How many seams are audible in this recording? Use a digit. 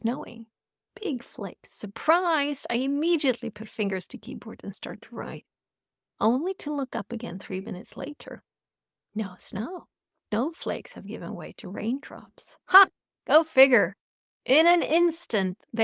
0